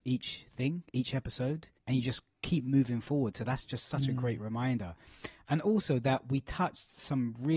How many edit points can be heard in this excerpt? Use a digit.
1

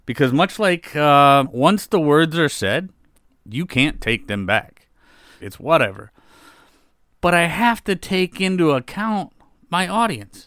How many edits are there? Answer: 2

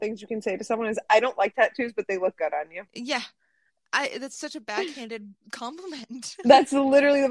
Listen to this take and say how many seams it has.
0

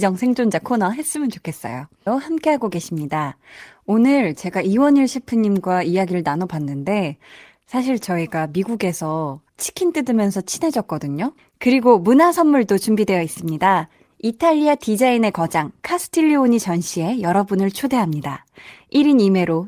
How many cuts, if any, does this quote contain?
3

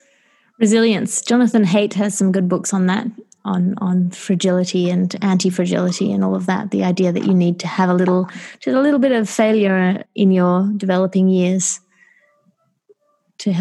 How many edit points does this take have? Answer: 2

